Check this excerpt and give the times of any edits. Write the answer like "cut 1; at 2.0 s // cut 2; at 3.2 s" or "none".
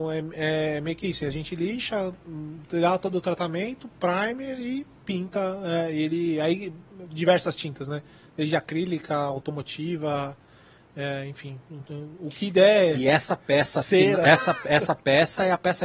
none